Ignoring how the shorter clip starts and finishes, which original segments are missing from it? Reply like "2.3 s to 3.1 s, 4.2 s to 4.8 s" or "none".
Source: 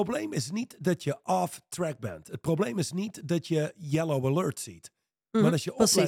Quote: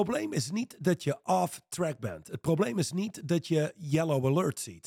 none